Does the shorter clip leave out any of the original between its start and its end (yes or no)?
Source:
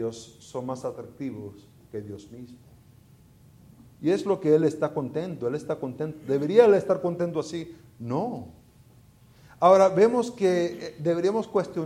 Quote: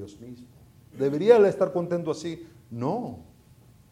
yes